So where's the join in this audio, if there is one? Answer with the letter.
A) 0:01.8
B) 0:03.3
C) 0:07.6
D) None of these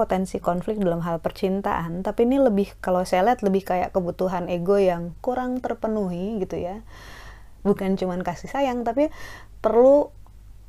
C